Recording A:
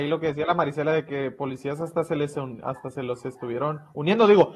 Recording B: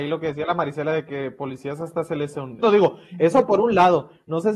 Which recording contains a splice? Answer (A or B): B